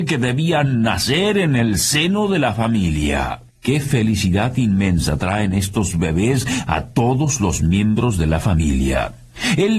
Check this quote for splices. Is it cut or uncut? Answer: cut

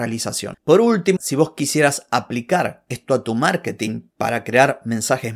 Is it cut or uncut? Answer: cut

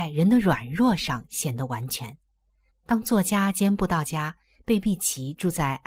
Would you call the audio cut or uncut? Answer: cut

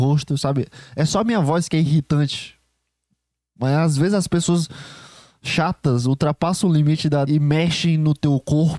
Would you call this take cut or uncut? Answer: cut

